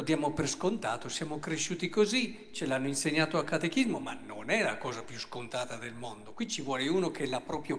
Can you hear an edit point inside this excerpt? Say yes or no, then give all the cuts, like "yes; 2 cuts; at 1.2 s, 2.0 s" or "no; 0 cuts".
no; 0 cuts